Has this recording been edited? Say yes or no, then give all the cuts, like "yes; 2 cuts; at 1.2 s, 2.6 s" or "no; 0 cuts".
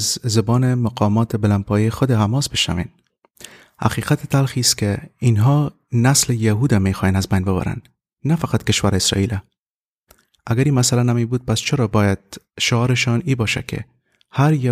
no; 0 cuts